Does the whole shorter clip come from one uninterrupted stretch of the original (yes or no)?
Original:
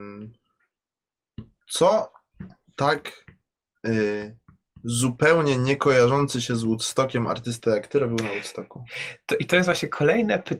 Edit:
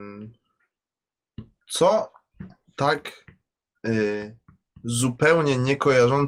yes